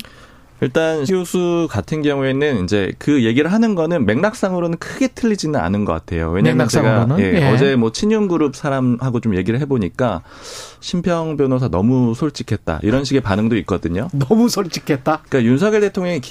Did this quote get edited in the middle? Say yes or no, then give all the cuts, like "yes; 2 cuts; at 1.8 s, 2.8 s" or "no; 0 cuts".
yes; 1 cut; at 1.1 s